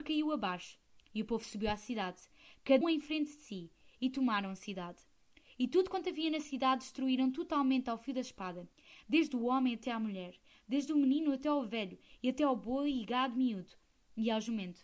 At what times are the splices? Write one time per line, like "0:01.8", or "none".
0:02.8